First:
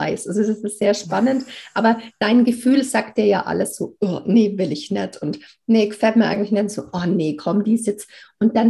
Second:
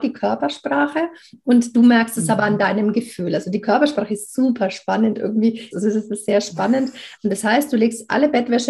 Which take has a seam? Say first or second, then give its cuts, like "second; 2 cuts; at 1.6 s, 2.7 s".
second; 2 cuts; at 5.7 s, 7.1 s